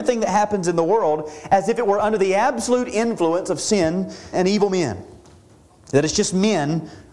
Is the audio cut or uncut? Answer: cut